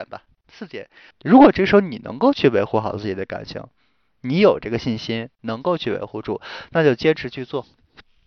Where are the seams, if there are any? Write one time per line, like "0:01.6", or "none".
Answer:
0:01.1